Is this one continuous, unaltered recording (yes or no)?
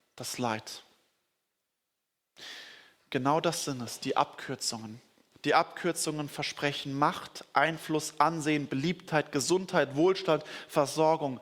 yes